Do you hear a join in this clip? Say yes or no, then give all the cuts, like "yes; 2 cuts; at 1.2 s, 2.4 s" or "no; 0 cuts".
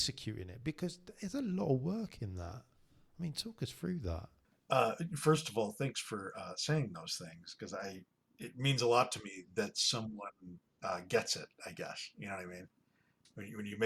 no; 0 cuts